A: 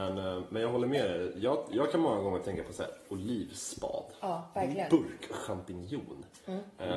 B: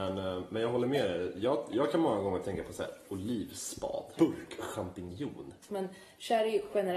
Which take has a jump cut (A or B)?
B